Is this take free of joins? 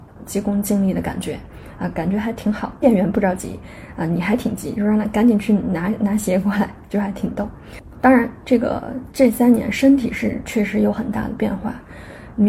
yes; 0 cuts

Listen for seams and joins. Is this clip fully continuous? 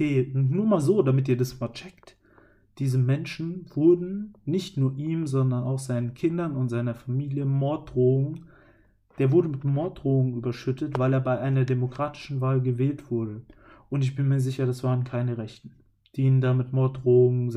yes; 0 cuts

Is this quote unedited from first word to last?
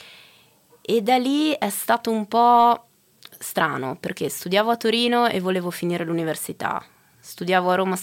yes; 0 cuts

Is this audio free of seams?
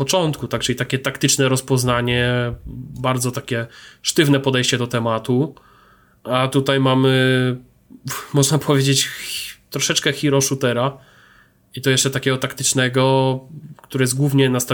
yes; 0 cuts

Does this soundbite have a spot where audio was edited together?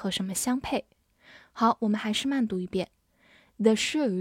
no; 0 cuts

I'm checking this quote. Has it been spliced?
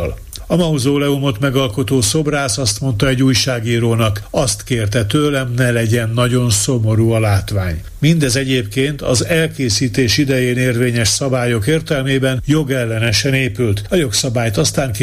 yes; 1 cut; at 13.9 s

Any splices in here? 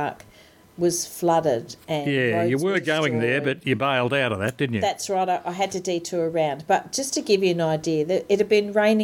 no; 0 cuts

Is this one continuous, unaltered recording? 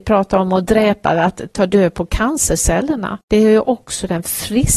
no; 2 cuts; at 1.5 s, 3.2 s

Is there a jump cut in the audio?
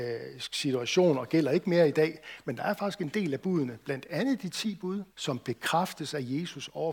yes; 1 cut; at 5.1 s

